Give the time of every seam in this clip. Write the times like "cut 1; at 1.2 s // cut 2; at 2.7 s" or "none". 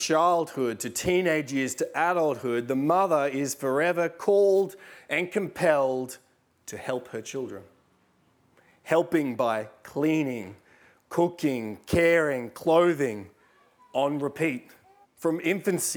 cut 1; at 15.0 s